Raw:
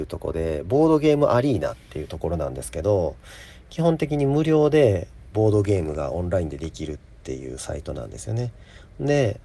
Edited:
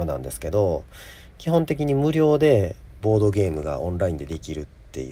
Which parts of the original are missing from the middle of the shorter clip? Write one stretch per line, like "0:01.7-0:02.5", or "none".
none

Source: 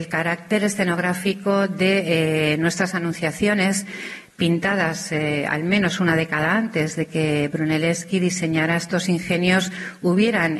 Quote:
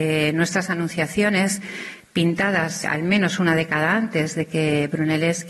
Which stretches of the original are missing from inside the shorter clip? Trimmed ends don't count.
0:05.1-0:05.4

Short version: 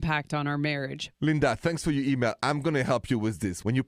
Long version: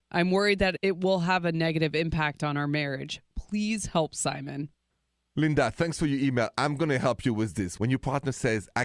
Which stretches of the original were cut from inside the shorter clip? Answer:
0:03.2-0:05.3

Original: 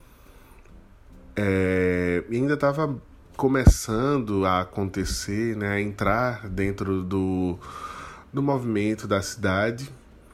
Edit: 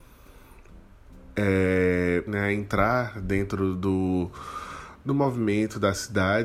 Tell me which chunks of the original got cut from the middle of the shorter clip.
0:02.3-0:05.5

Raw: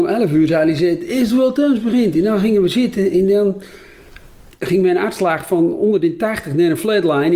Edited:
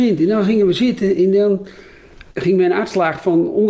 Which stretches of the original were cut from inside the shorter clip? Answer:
0:04.2-0:04.5

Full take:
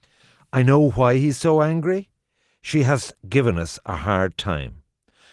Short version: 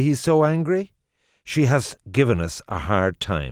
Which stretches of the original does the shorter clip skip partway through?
none

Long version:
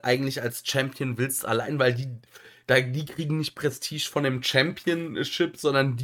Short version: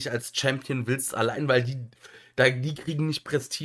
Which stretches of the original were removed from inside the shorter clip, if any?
none

